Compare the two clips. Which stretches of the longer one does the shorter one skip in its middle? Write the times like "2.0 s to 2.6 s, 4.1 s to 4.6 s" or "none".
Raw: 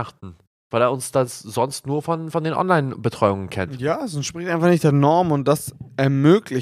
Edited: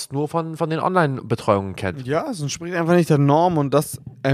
none